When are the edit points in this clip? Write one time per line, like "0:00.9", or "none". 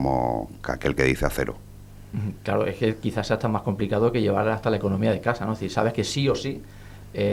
none